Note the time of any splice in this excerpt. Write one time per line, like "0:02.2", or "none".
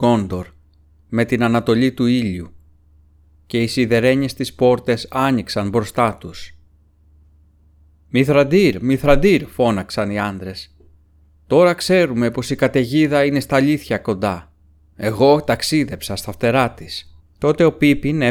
0:14.9
0:17.2